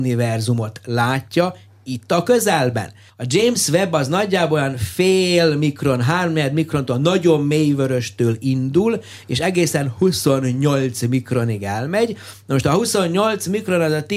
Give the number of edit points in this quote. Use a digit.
1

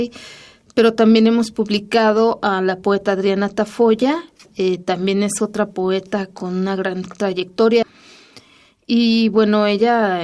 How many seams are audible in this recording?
1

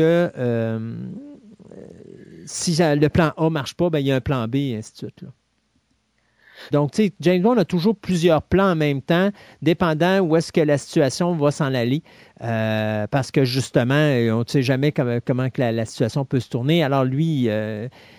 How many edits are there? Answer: 1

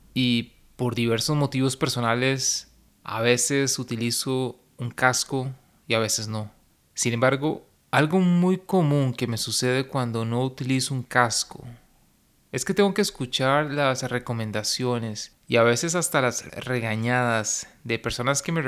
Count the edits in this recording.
1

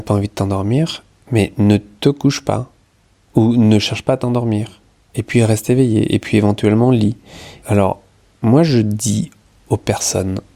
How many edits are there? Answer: 1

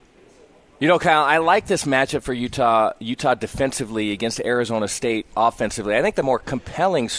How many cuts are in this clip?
0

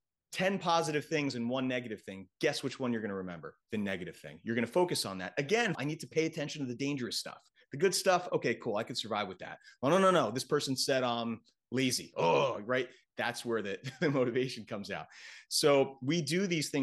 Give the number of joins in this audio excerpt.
1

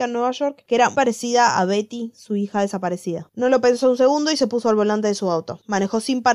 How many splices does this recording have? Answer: 1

